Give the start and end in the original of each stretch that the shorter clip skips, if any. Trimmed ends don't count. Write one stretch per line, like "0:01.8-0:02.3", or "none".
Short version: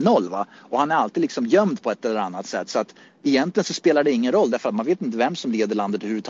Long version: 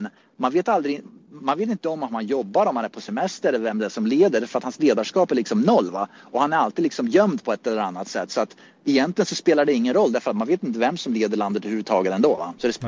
none